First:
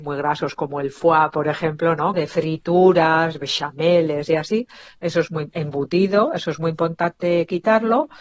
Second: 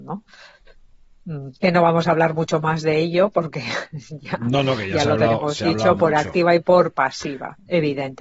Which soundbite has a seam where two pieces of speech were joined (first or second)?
first